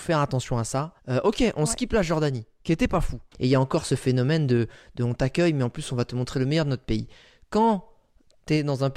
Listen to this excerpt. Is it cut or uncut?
cut